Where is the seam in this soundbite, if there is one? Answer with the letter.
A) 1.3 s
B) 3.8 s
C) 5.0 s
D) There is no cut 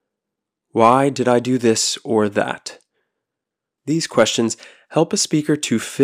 B